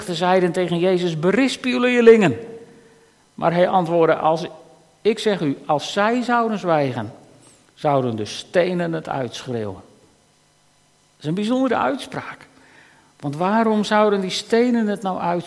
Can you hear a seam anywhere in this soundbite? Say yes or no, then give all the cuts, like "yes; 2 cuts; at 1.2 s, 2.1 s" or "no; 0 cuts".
no; 0 cuts